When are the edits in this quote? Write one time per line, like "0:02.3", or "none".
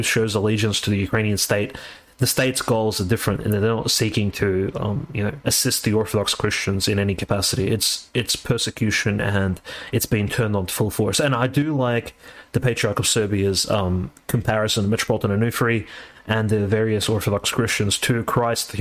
none